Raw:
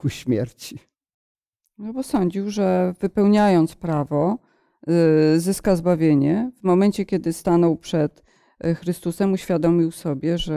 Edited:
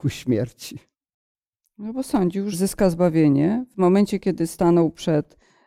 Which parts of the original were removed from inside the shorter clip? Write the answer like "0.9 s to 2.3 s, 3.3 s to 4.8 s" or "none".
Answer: 2.5 s to 5.4 s